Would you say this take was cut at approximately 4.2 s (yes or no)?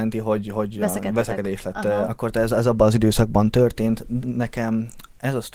yes